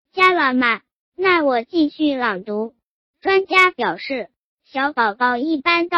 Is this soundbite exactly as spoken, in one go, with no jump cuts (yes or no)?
yes